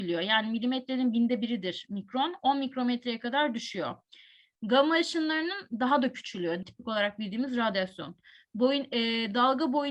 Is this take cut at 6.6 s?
yes; 1 cut; at 6.6 s

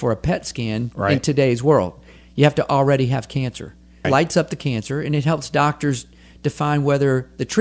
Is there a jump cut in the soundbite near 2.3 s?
no; 1 cut; at 4.0 s

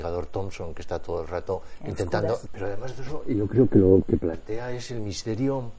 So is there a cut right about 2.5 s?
yes; 1 cut; at 2.5 s

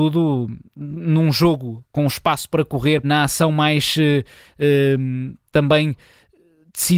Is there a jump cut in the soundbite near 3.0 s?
yes; 1 cut; at 3.0 s

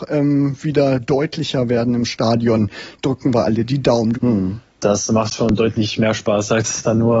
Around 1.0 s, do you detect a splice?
no; 1 cut; at 4.1 s

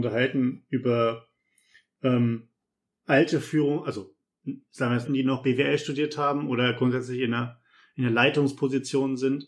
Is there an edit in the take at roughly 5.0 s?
yes; 1 cut; at 5.0 s

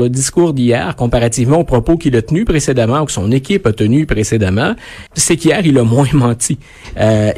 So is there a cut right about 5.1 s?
yes; 1 cut; at 5.1 s

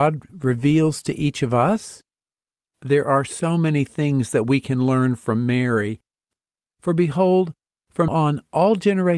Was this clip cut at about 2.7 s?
no; 2 cuts; at 6.6 s, 8.1 s

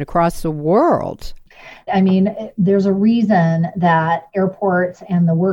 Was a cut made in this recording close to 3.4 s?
no; 1 cut; at 1.9 s

